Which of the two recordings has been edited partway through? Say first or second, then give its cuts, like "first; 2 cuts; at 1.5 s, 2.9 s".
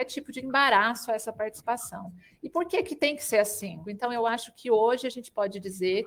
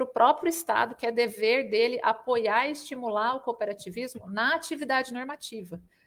first; 1 cut; at 3.8 s